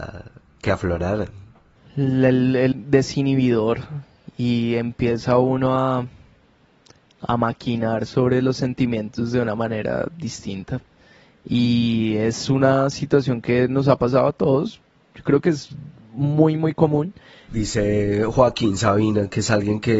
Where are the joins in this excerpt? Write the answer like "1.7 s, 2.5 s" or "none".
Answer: 2.7 s, 17.5 s